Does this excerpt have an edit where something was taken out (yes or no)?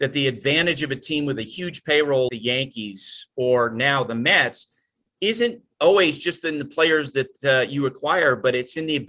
yes